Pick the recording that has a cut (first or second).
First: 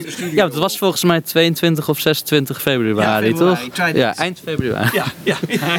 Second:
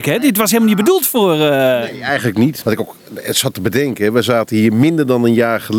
second